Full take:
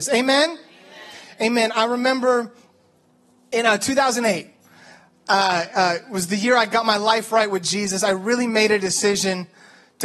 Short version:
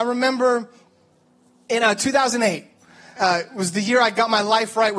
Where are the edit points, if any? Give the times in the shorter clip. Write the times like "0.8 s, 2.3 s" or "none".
3.2 s

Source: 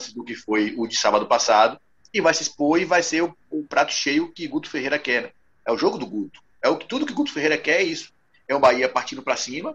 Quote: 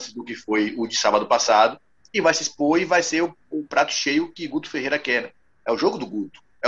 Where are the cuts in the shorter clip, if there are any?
none

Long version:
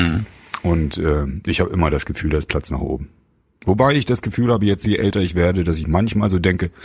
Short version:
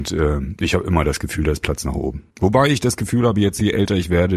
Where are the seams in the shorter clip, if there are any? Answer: 2.3 s

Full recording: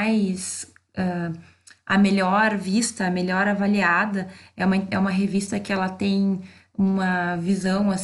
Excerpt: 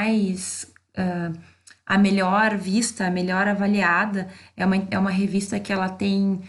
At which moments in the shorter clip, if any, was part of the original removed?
none

